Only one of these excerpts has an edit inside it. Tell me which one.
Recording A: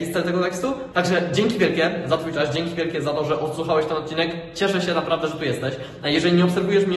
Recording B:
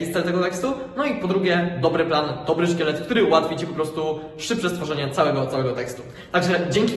A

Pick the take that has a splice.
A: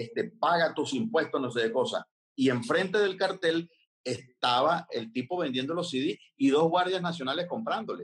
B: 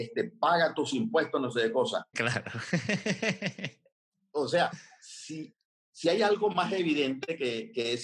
B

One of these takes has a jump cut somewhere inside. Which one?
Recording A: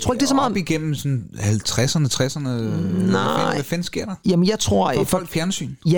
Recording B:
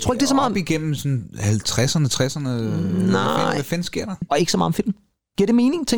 B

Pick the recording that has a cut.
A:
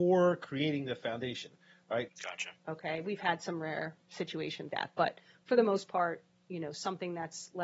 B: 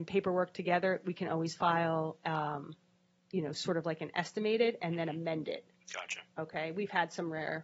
A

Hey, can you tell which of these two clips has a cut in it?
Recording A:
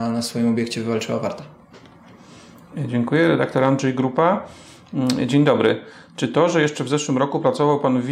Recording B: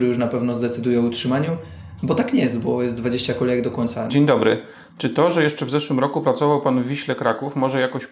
B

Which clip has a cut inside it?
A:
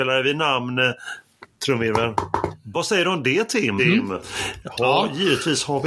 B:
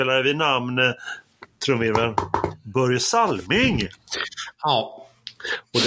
A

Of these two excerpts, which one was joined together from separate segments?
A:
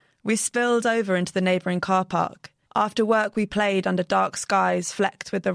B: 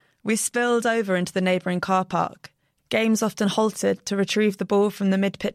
A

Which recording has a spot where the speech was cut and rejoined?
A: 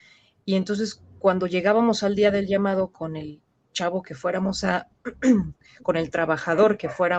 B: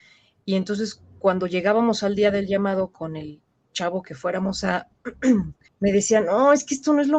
B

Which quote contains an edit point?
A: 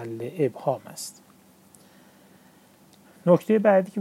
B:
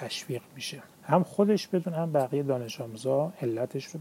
B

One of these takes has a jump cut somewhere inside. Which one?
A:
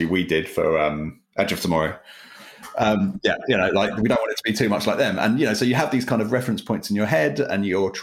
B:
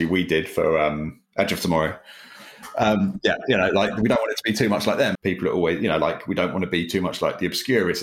B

